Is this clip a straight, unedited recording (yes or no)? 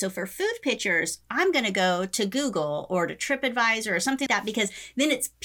no